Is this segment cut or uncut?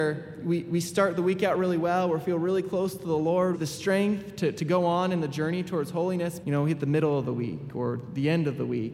cut